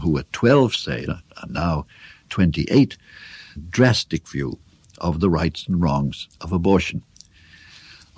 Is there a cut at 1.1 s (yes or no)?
yes